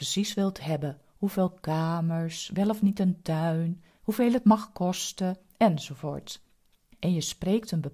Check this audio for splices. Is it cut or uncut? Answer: uncut